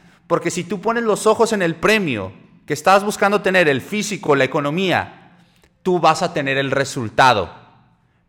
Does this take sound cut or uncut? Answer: uncut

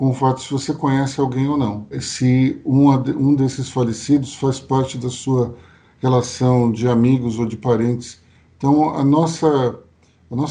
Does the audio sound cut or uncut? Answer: cut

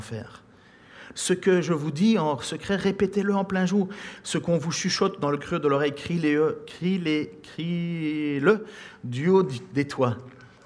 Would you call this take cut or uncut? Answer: cut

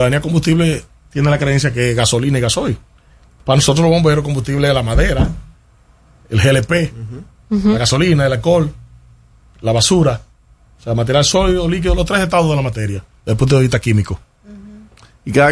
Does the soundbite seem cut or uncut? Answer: uncut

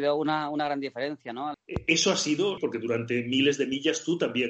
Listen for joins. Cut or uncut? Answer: cut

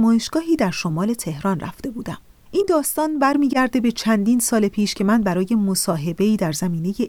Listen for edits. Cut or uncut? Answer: cut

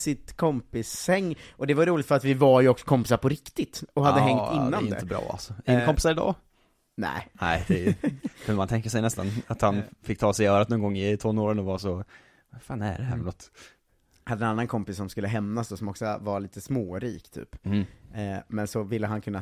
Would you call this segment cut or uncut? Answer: uncut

